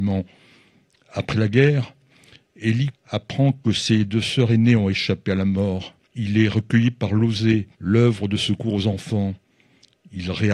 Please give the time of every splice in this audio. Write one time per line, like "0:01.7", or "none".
0:02.9
0:06.0
0:07.7